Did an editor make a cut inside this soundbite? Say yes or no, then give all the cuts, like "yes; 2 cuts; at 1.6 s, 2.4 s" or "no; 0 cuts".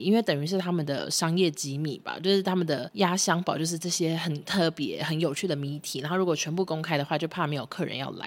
no; 0 cuts